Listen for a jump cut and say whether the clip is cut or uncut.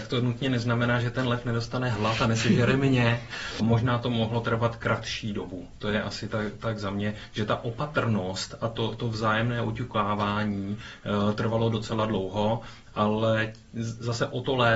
cut